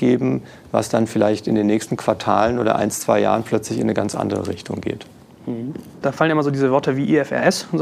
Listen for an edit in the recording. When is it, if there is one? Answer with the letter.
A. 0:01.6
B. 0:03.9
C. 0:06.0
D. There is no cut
C